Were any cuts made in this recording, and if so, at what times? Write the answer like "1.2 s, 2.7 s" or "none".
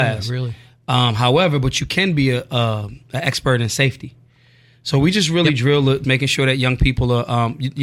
6.0 s